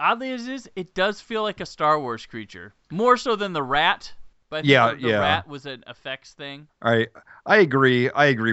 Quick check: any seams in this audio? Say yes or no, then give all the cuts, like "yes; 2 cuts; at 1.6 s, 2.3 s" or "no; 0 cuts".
no; 0 cuts